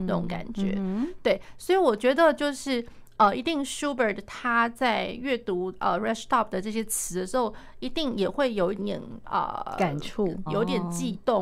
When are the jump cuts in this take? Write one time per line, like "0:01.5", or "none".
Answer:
0:08.8
0:10.5